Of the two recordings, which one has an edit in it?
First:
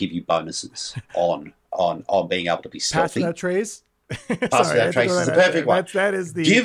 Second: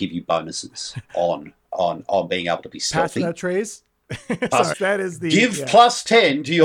second; 1 cut; at 4.7 s

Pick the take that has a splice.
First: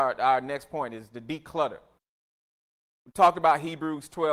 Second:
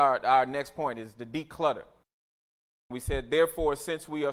second; 1 cut; at 2.9 s

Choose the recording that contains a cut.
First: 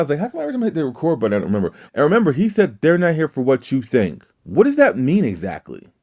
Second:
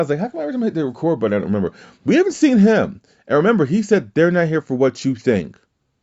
first; 2 cuts; at 1.9 s, 4.3 s

